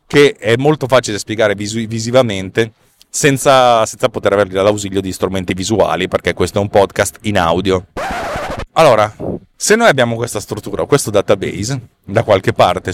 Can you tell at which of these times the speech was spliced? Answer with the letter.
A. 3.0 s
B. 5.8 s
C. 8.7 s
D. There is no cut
C